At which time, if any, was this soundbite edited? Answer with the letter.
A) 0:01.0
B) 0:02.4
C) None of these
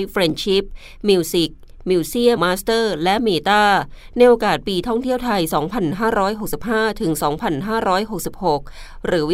B